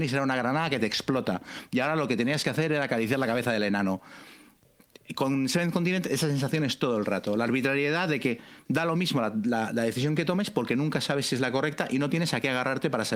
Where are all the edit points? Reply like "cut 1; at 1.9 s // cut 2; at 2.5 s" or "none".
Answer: none